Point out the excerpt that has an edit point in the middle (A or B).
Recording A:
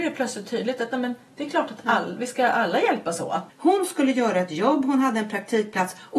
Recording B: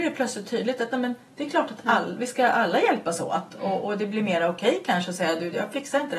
A